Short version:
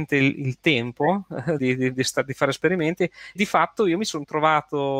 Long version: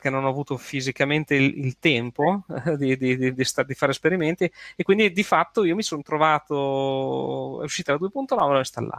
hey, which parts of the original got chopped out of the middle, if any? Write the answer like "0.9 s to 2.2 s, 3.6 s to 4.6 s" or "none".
2.8 s to 3.0 s, 4.8 s to 5.1 s